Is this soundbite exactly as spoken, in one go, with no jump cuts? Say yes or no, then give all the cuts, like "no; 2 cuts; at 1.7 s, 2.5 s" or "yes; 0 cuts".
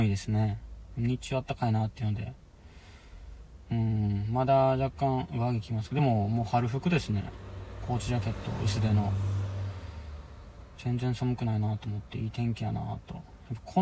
yes; 0 cuts